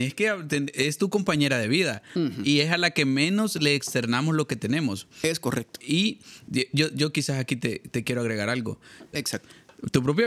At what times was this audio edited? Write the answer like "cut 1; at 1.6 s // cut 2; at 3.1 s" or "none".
cut 1; at 9.1 s